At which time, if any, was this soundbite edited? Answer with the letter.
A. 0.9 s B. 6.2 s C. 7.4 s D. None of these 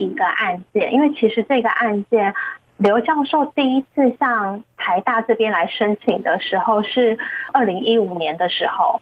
D